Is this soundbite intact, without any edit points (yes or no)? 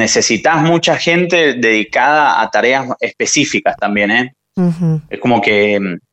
yes